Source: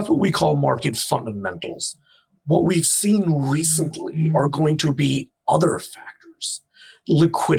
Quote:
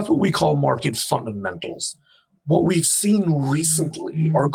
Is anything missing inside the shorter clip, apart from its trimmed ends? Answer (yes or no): no